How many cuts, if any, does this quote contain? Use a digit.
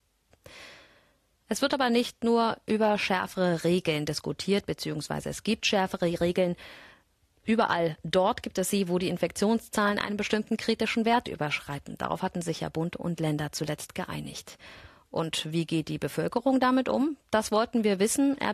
0